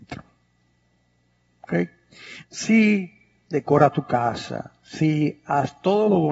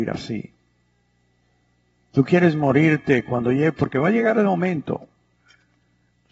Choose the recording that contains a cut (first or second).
first